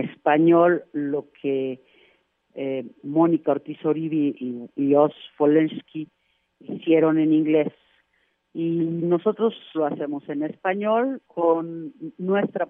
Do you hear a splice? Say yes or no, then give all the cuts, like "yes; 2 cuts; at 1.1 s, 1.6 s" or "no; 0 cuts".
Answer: yes; 2 cuts; at 9.7 s, 11.3 s